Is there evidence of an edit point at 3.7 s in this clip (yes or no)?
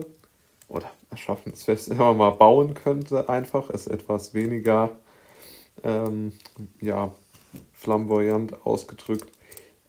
no